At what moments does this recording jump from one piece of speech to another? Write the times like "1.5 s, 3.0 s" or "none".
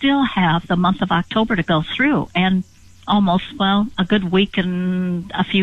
none

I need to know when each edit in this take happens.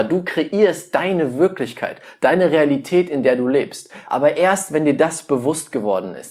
none

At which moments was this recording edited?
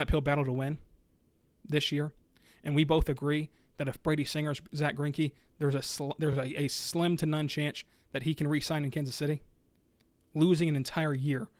none

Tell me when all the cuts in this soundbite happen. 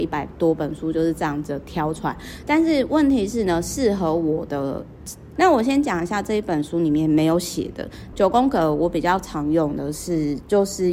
5.4 s, 8.1 s

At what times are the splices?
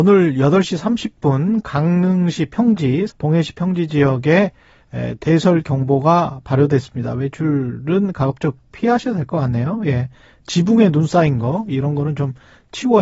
3.1 s

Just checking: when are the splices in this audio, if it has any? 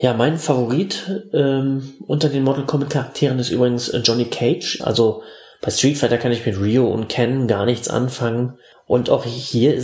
4.8 s

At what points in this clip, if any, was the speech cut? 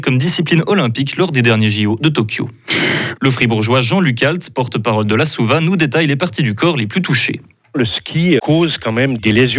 3.2 s, 8.4 s

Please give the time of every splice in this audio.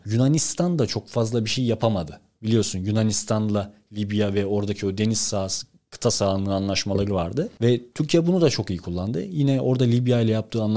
none

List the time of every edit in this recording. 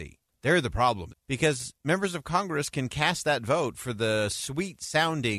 1.1 s

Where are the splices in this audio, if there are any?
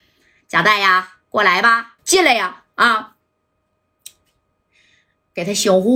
2.0 s

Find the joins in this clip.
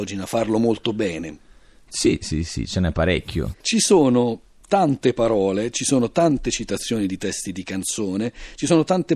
3.5 s

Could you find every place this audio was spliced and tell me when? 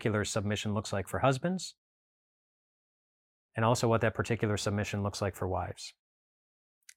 none

